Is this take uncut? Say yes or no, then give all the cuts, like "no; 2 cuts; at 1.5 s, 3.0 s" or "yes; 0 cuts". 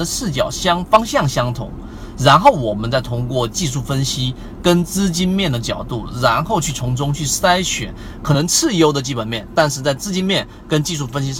yes; 0 cuts